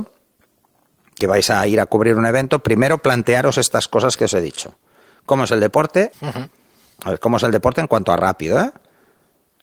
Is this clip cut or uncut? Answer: cut